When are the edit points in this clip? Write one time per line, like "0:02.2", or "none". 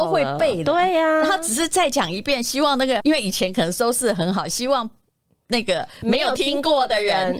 0:03.0